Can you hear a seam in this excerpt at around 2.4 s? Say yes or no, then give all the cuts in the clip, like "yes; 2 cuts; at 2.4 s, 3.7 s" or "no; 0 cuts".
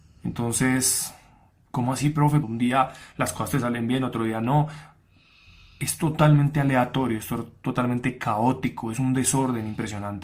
yes; 1 cut; at 2.4 s